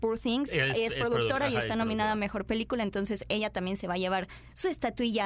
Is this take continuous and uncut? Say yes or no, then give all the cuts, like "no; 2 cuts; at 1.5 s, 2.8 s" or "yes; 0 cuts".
yes; 0 cuts